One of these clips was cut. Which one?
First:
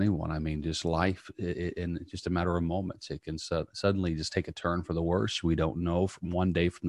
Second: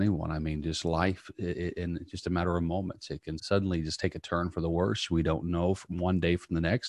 second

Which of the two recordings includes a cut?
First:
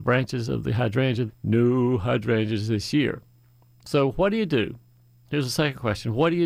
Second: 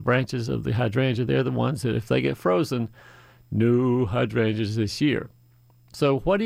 first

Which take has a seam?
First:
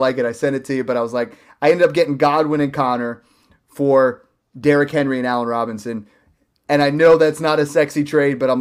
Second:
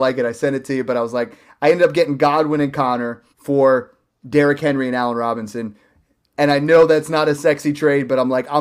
second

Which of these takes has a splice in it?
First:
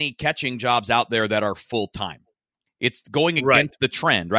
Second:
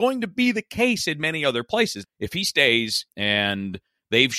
second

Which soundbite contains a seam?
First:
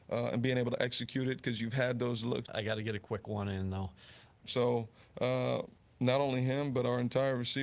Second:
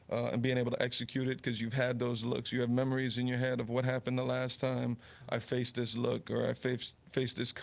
first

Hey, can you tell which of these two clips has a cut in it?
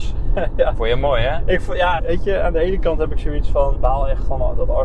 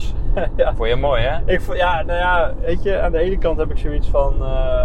first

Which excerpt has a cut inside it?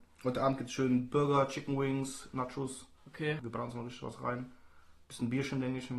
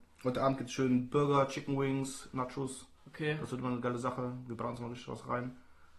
first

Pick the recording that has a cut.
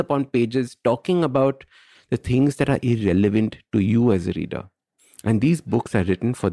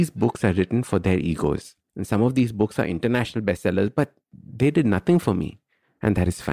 second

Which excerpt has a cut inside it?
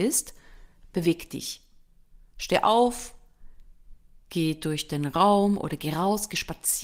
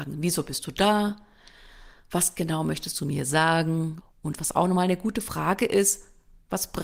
second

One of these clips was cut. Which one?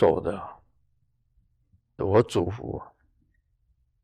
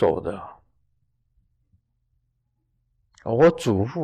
first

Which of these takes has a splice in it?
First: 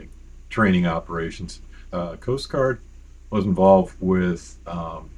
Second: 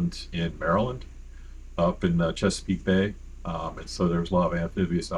first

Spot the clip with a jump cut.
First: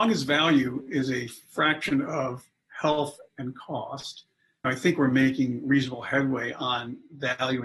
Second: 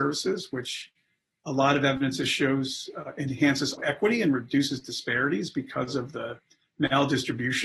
second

